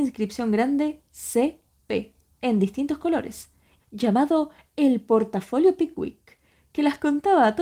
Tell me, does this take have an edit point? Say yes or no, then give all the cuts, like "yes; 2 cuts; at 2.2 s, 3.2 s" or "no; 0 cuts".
yes; 1 cut; at 3.8 s